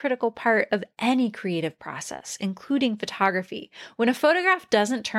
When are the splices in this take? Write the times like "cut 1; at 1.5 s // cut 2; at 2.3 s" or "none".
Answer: none